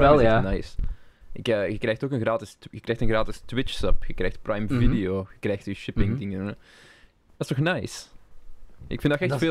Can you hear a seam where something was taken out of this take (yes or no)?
no